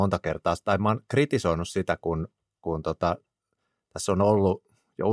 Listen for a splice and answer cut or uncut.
uncut